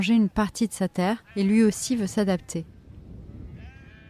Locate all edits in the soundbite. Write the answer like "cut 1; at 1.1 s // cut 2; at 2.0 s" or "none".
cut 1; at 1.3 s